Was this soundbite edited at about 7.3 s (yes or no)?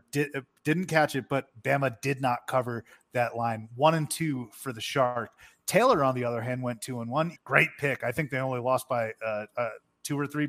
yes